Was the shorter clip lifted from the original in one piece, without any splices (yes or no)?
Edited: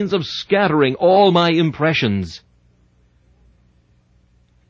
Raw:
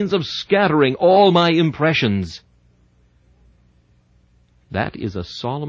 yes